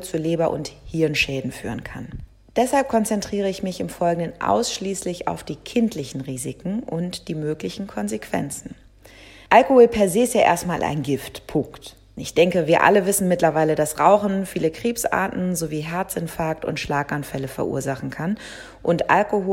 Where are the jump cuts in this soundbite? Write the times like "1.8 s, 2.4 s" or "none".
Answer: 9.5 s, 12.2 s